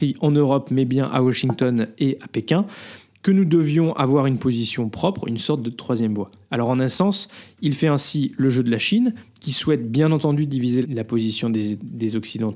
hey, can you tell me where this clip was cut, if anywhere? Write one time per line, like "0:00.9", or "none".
0:10.8